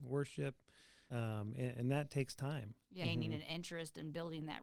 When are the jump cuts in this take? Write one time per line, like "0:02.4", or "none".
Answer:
0:01.1
0:03.0